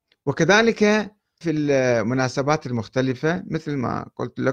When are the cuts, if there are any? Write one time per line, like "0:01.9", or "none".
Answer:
0:01.4

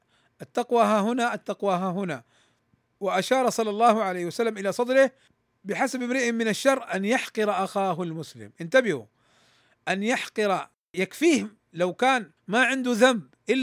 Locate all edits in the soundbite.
0:12.4

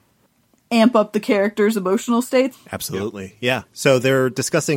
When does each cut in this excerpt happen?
0:02.5
0:03.7

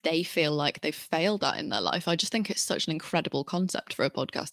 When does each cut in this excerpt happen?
none

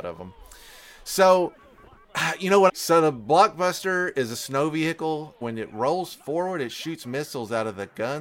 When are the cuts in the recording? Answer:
0:02.7
0:05.4

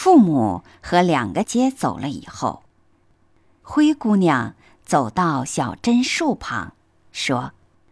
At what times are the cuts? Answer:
0:01.4

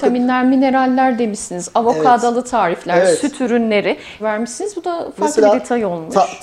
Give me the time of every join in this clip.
0:04.2

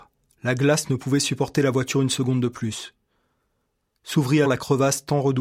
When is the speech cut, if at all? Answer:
0:04.4

